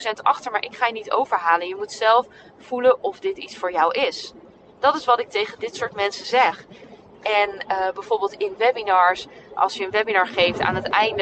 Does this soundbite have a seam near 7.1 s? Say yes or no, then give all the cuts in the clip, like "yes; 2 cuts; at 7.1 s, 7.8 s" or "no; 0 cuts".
yes; 2 cuts; at 7.1 s, 9.6 s